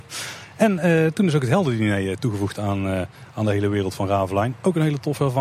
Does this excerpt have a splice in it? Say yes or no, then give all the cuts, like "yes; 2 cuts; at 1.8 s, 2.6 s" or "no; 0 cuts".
no; 0 cuts